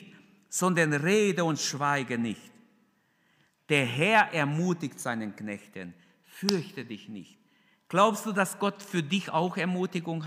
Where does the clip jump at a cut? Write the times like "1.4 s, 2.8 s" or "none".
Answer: none